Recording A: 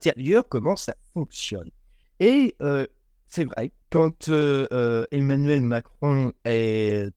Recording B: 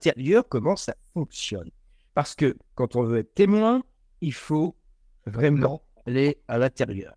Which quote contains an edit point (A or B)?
A